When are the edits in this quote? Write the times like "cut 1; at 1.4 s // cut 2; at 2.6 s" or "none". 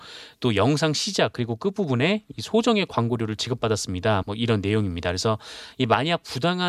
cut 1; at 4.2 s